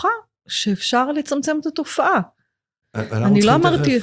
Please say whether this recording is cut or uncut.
cut